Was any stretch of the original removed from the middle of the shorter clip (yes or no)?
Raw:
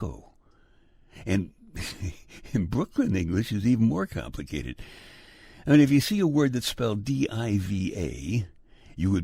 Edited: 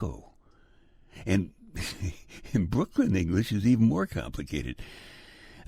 no